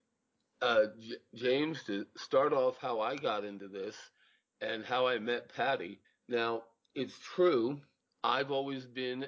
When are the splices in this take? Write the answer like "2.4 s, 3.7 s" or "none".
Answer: 6.0 s